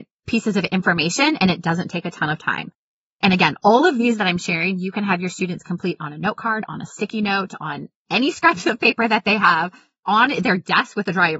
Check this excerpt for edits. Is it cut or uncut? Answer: uncut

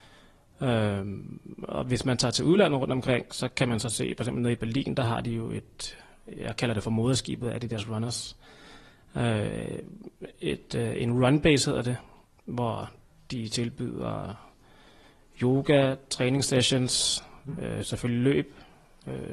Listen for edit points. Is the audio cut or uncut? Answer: uncut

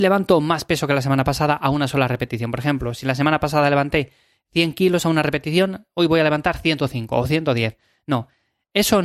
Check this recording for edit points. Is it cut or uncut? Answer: uncut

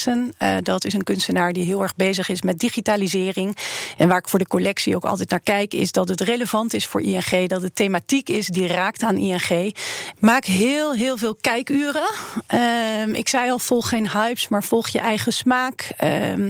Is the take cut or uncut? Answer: cut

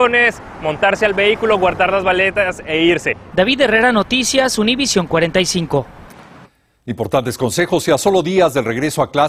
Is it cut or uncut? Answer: cut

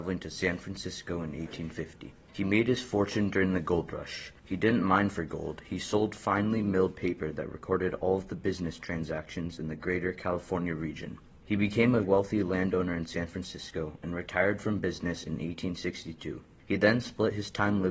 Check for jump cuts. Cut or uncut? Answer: cut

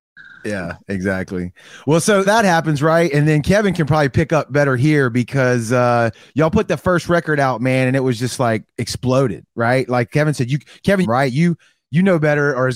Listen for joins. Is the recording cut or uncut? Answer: cut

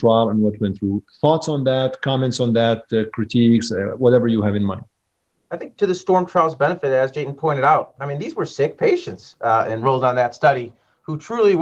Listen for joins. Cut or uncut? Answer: uncut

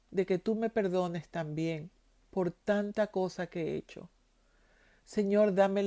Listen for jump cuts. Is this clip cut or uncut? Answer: uncut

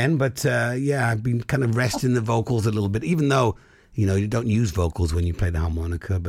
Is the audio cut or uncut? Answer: uncut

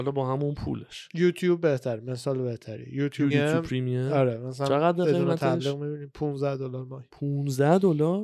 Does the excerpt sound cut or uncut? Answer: cut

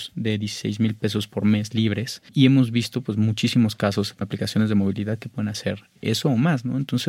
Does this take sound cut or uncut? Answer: uncut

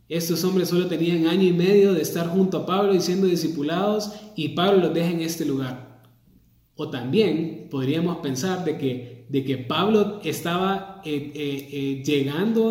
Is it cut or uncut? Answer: uncut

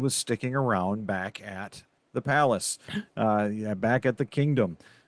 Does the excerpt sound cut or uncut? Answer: uncut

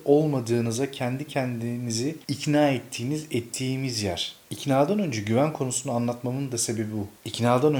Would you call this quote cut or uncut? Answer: uncut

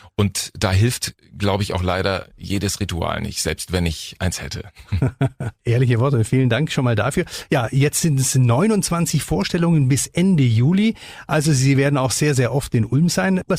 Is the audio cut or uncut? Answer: uncut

